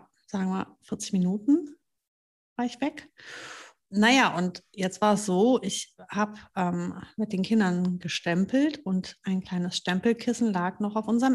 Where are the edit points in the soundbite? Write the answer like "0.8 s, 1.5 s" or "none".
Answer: 3.9 s